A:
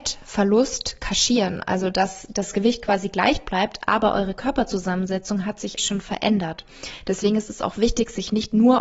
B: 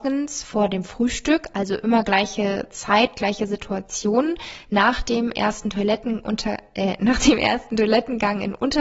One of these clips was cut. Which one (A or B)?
A